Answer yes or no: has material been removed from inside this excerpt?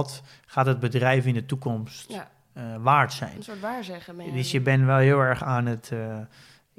no